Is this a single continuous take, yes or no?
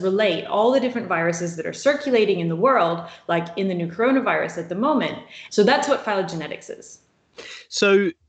no